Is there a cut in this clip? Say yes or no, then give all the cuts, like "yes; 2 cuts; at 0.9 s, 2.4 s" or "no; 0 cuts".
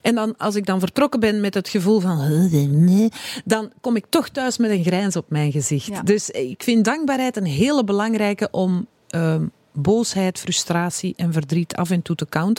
no; 0 cuts